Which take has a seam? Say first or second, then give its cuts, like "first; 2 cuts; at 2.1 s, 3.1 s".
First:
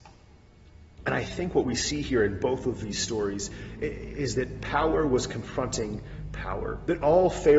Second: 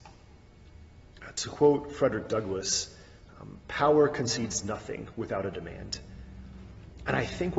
first; 1 cut; at 1.0 s